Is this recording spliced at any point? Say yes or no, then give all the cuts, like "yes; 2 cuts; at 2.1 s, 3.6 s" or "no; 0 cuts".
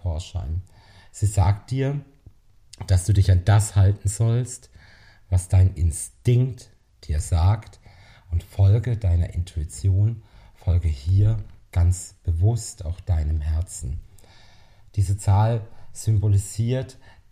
no; 0 cuts